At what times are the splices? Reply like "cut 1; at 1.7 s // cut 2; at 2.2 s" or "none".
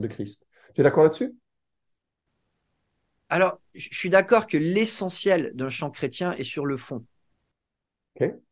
none